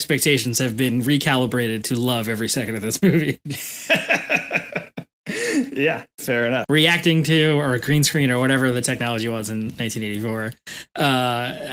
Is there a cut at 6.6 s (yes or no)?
yes